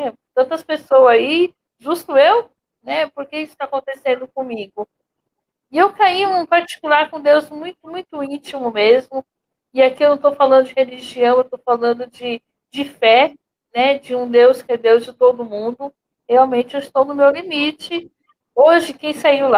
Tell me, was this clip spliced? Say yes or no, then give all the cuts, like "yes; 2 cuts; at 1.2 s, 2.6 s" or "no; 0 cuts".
yes; 2 cuts; at 16.2 s, 18.4 s